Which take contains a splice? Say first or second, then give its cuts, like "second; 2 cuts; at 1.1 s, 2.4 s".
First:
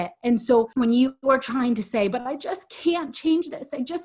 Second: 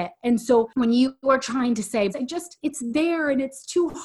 second; 1 cut; at 2.1 s